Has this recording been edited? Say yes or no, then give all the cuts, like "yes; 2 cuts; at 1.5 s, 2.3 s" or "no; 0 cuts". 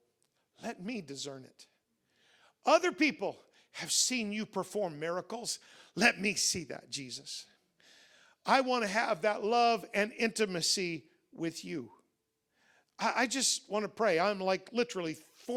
no; 0 cuts